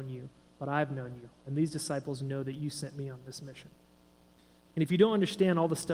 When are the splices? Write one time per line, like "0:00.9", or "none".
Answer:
0:04.7